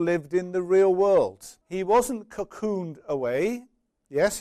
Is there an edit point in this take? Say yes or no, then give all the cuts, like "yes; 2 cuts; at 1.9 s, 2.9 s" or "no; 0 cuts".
yes; 1 cut; at 1.6 s